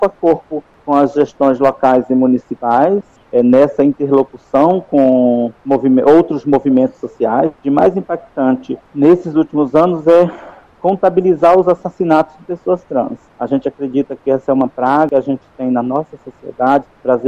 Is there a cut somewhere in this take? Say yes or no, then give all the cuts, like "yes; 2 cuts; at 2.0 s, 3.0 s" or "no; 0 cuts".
yes; 1 cut; at 7.6 s